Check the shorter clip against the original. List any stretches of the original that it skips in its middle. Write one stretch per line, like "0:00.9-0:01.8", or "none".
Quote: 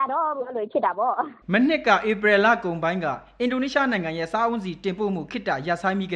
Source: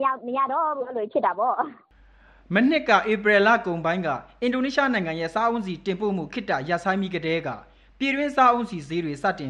0:01.8-0:02.4